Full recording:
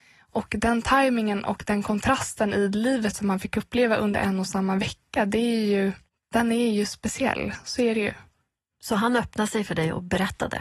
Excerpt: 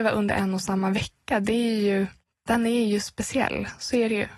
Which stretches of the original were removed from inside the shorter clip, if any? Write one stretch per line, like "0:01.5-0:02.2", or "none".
none